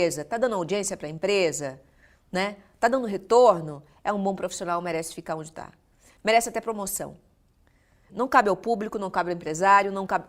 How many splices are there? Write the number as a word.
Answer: one